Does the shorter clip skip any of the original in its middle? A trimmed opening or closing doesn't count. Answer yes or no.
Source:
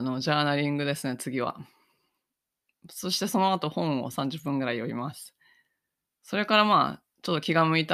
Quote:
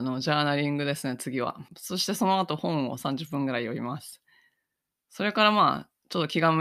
yes